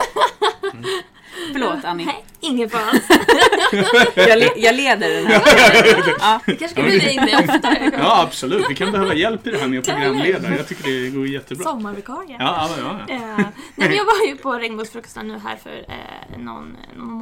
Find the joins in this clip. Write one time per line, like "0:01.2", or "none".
none